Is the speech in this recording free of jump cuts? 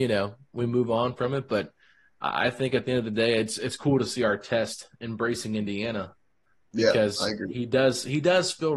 yes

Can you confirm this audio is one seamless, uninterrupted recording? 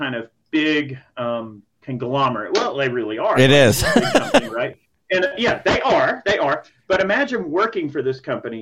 no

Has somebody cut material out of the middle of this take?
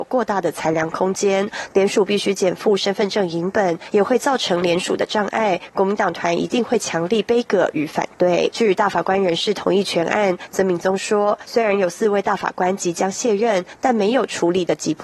yes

